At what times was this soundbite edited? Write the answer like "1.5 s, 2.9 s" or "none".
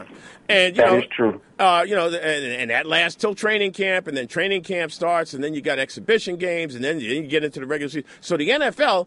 none